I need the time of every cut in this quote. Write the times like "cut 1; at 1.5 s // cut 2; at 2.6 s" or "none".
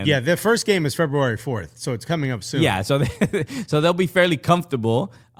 none